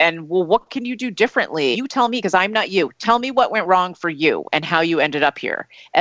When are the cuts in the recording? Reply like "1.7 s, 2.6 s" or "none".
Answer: 1.7 s

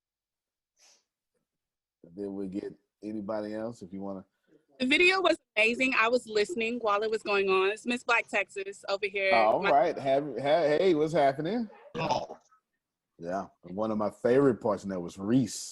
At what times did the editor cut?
11.9 s, 13.5 s

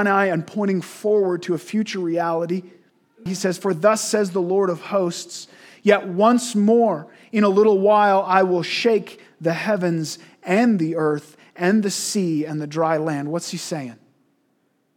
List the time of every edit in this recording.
3.3 s

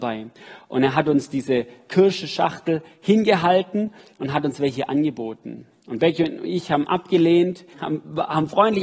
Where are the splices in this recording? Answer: 7.7 s

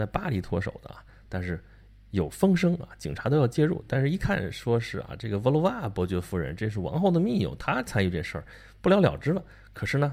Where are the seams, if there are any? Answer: none

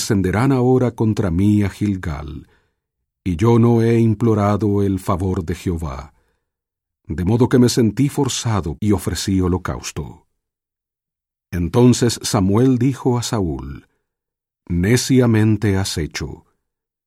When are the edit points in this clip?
8.8 s

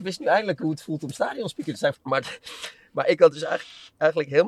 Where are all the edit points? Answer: 1.9 s

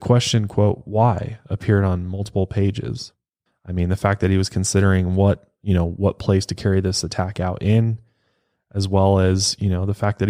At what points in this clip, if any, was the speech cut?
3.5 s

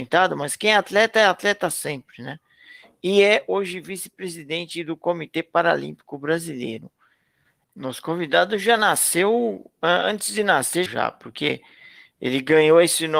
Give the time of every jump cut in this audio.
7.6 s, 10.9 s

